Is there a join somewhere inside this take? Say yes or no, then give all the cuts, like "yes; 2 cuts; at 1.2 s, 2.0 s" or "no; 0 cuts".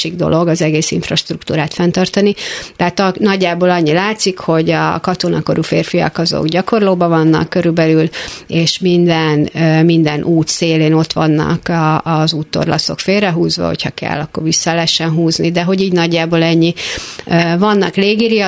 no; 0 cuts